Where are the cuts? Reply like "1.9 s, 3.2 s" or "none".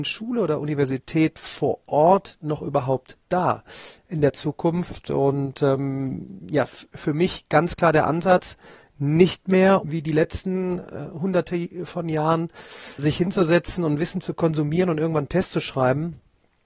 9.8 s, 13.0 s